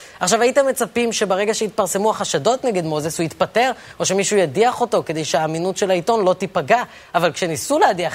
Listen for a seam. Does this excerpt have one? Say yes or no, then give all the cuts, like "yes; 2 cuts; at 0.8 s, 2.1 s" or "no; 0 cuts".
no; 0 cuts